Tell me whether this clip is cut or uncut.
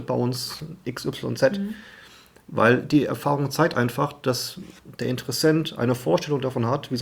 uncut